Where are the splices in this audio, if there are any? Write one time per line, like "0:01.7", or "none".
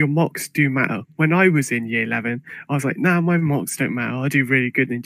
none